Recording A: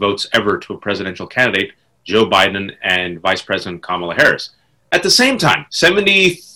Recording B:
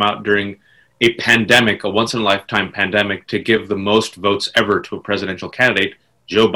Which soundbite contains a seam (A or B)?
A